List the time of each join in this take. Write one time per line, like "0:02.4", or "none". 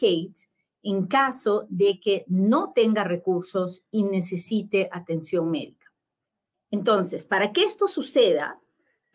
0:06.5